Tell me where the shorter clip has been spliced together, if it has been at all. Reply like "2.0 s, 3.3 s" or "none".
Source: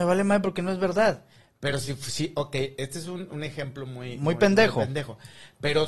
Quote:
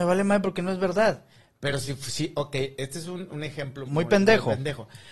3.9 s